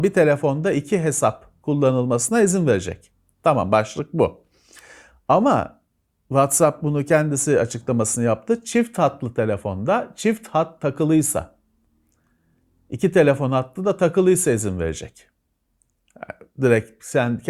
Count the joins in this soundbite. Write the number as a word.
zero